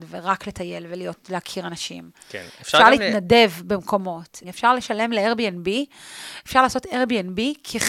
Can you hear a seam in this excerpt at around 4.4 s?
yes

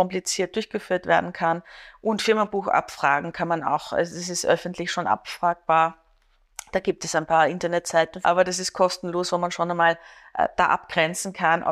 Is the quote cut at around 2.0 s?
no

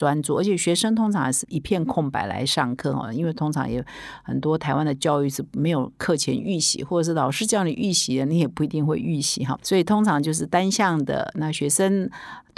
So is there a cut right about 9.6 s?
no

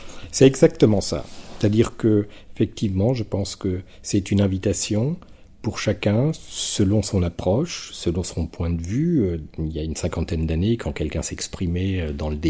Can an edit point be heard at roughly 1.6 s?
no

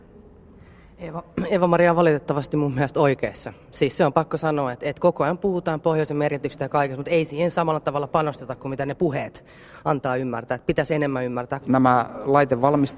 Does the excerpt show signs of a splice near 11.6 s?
yes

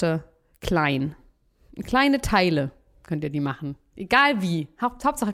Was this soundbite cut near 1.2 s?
no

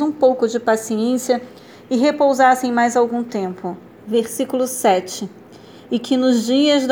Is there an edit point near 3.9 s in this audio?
yes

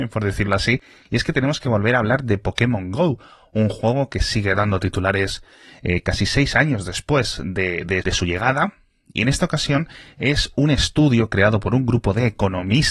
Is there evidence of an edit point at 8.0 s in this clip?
yes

